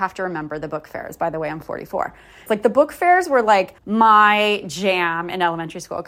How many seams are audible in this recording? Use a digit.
2